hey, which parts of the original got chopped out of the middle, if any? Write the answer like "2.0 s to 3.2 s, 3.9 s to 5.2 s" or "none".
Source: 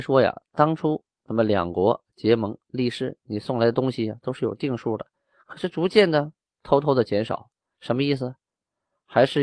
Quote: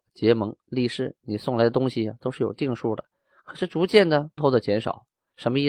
6.4 s to 6.8 s